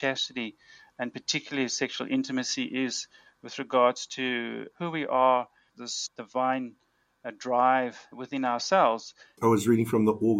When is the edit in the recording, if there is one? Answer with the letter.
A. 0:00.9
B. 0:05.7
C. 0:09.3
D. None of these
B